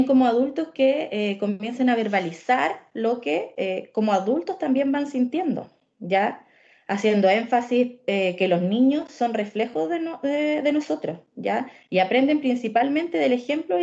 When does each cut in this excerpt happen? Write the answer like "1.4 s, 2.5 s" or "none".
none